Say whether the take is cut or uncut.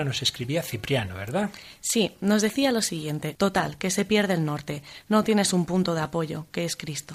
cut